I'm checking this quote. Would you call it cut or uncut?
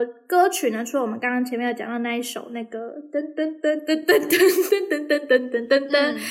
uncut